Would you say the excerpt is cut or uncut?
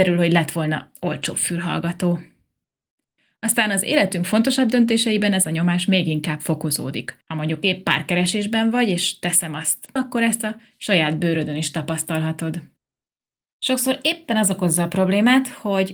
cut